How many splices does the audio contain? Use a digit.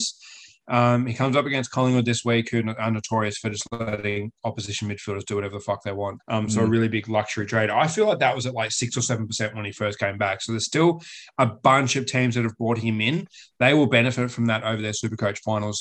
1